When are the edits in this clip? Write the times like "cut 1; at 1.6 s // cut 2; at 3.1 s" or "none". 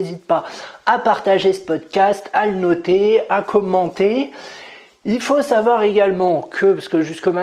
none

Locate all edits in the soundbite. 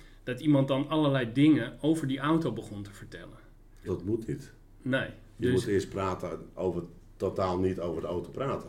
cut 1; at 3.9 s

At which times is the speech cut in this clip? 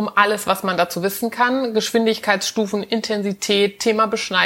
none

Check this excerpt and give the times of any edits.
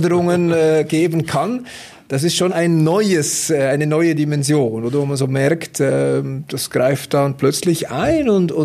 cut 1; at 2.5 s

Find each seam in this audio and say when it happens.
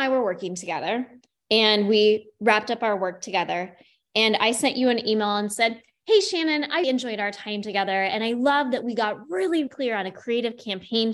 cut 1; at 6.8 s // cut 2; at 9.7 s

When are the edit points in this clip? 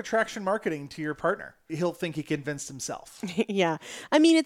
cut 1; at 1.7 s

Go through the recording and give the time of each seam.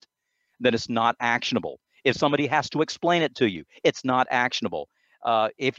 none

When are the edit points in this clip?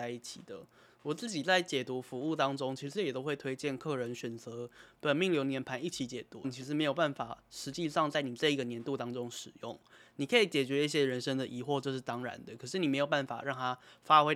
cut 1; at 6.4 s

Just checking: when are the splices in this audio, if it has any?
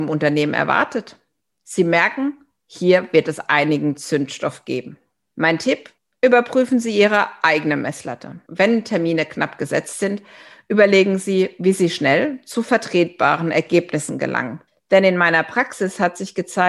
cut 1; at 1.5 s

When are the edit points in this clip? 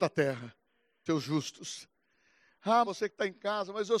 cut 1; at 1.1 s // cut 2; at 2.8 s

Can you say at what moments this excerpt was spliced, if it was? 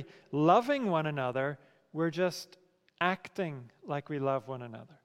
none

